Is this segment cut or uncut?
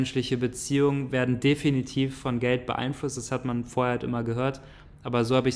uncut